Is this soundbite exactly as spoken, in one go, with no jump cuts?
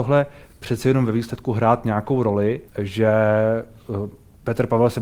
no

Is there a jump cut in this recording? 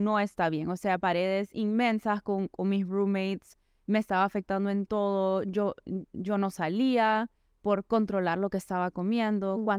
no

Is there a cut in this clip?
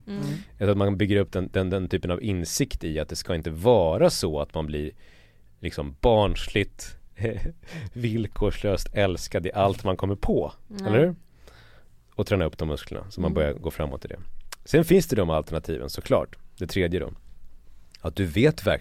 no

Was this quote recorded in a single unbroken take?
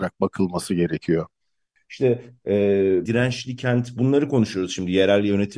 no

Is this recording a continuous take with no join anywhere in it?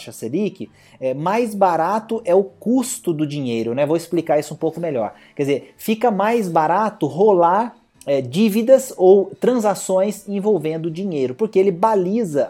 yes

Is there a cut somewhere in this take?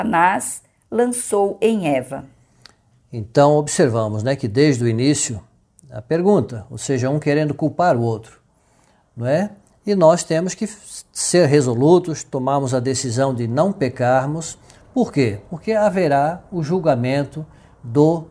no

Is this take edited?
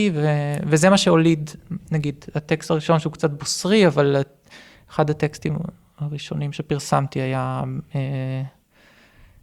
no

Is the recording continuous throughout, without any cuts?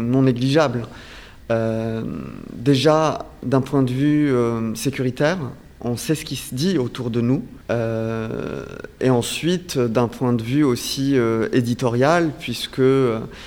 no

